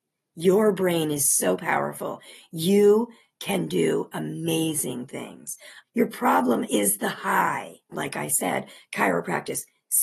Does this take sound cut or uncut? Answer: cut